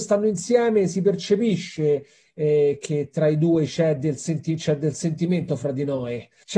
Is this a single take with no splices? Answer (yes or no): yes